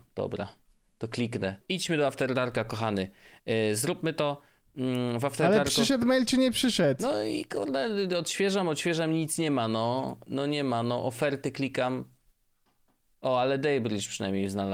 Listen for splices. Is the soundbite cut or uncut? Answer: cut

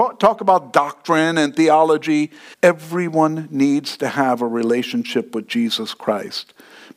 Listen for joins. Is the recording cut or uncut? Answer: cut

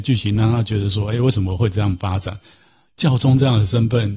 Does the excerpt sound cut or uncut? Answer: cut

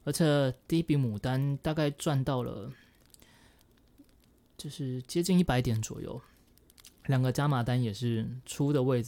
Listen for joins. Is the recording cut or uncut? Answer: uncut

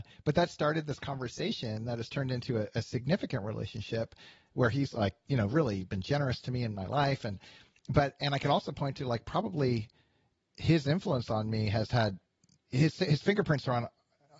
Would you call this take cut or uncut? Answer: uncut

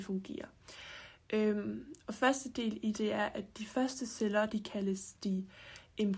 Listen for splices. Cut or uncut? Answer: cut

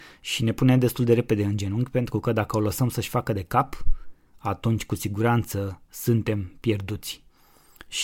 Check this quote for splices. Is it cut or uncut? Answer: uncut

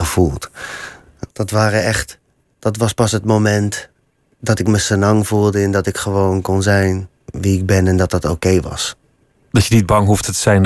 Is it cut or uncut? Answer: cut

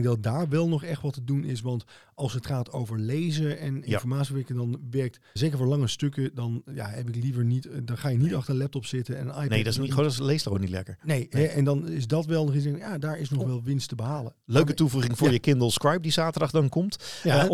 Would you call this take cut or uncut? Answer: cut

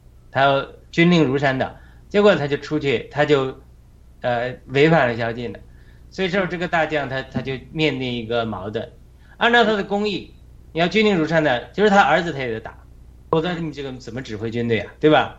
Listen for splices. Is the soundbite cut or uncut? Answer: cut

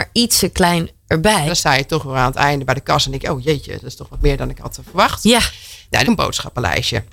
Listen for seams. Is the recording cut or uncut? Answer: cut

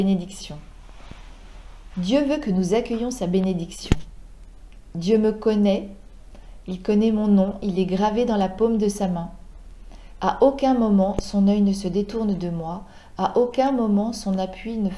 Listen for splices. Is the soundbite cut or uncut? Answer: uncut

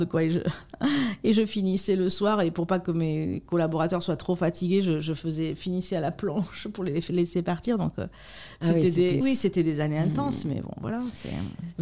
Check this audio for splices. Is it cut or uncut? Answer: cut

